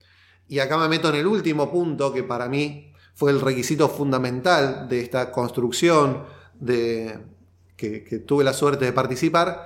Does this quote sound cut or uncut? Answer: uncut